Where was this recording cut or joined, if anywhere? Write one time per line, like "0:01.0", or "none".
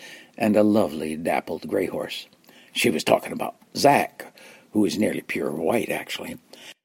none